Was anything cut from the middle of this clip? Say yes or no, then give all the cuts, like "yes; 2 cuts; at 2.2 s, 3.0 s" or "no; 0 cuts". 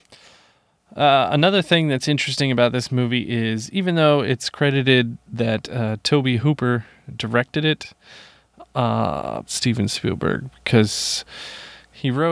yes; 1 cut; at 9.5 s